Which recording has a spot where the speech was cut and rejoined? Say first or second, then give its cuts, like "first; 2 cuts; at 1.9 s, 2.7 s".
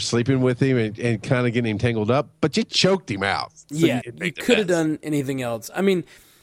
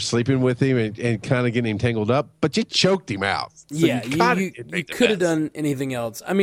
first; 1 cut; at 4.0 s